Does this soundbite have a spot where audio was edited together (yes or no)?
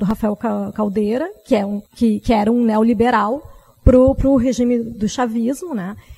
yes